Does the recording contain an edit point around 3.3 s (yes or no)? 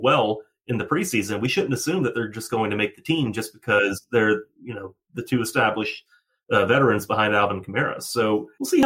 no